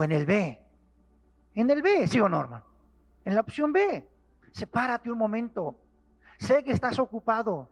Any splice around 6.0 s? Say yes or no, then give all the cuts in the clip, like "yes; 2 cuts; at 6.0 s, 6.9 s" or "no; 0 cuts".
no; 1 cut; at 4.4 s